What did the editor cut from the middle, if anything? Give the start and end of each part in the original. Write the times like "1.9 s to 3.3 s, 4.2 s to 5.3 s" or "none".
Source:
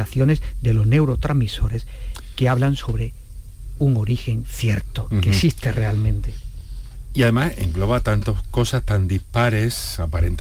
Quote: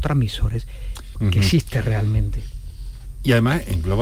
2.3 s to 5.1 s